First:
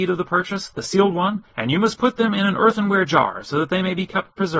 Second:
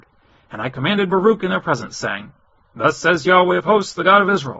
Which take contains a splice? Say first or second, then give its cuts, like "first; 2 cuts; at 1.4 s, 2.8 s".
first; 1 cut; at 1.5 s